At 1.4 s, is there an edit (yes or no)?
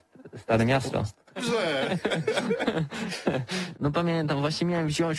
yes